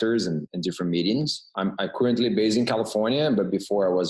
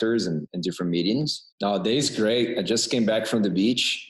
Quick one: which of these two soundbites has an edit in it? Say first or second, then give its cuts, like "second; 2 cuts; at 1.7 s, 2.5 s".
second; 1 cut; at 1.5 s